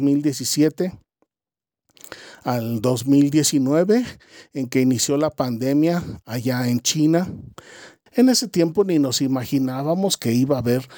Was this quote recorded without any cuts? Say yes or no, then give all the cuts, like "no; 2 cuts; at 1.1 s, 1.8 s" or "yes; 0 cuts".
no; 1 cut; at 8.1 s